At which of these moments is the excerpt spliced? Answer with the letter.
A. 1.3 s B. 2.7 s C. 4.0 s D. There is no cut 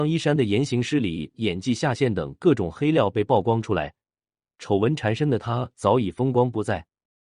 A